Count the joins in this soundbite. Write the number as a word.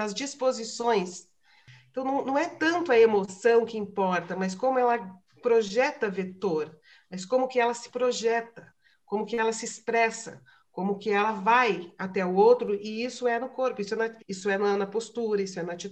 one